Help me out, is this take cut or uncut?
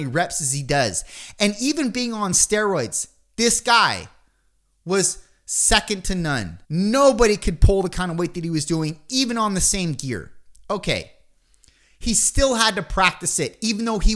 cut